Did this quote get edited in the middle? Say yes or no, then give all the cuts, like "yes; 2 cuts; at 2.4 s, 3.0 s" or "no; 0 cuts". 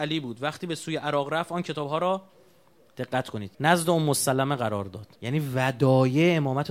yes; 2 cuts; at 3.5 s, 5.1 s